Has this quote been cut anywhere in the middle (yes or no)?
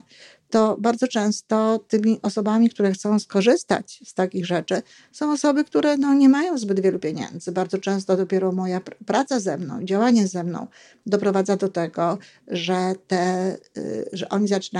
no